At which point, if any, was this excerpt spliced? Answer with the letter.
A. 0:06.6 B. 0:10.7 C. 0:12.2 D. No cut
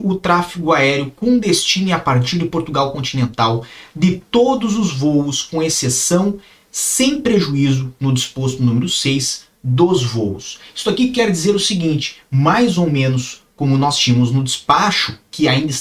D